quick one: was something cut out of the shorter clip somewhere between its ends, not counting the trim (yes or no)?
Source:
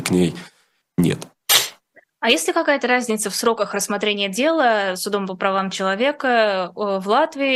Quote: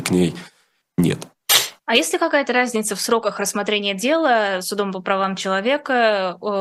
yes